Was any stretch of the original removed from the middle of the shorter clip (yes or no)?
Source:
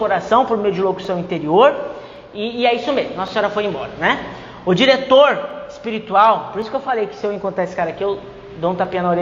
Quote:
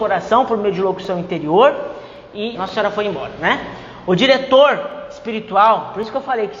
yes